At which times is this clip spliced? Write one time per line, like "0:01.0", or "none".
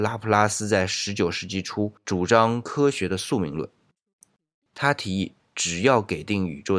none